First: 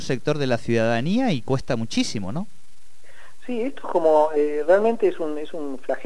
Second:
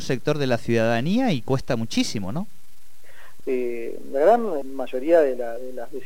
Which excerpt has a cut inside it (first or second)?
second